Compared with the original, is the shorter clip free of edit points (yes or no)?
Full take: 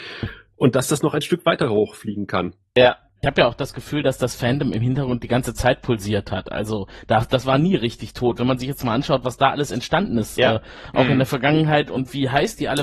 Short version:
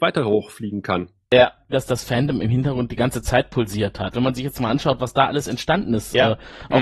no